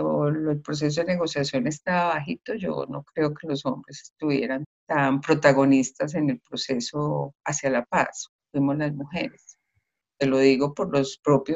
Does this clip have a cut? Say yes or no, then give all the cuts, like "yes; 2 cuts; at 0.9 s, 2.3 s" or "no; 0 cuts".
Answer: no; 0 cuts